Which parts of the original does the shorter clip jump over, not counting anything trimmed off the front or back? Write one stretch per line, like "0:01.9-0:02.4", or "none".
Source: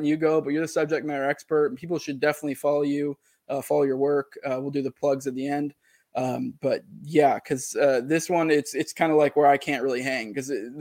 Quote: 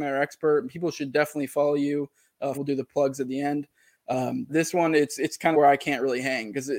0:03.6-0:04.6
0:06.6-0:08.0
0:09.1-0:09.3

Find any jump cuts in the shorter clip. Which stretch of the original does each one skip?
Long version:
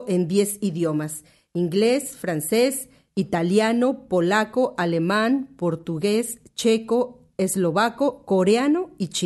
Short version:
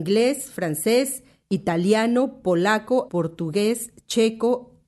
0:04.7-0:05.6

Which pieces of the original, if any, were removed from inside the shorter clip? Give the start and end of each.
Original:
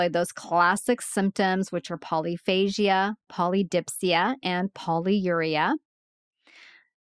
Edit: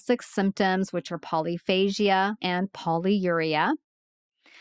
0:03.2-0:04.4

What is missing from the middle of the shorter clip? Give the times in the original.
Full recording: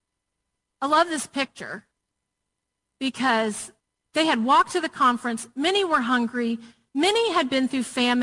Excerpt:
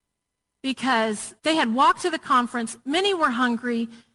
0:03.8-0:04.1

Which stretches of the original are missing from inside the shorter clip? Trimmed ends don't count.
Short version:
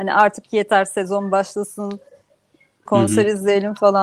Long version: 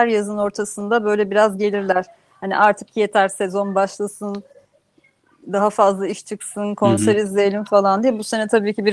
0:05.3-0:06.8

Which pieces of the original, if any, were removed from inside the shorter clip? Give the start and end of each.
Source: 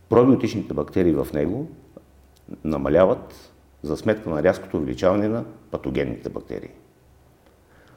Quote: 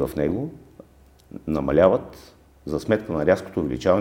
none

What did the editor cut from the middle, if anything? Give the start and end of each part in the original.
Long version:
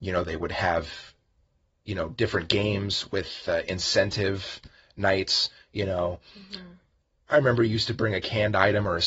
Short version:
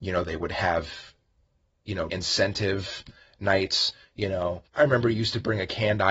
0:02.1-0:03.7
0:06.2-0:07.2

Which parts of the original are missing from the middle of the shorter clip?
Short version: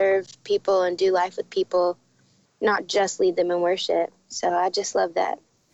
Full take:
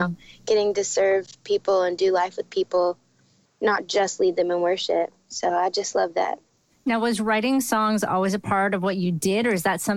none

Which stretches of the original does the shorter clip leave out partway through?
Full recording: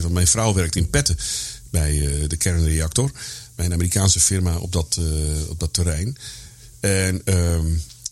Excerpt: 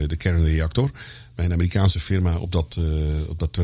none

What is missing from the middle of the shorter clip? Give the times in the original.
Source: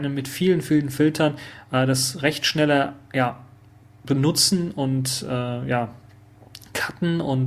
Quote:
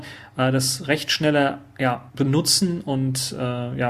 0:03.4-0:04.0

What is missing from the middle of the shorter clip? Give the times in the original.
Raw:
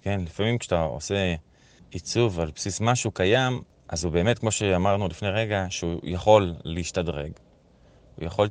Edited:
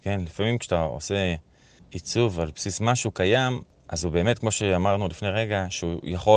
none

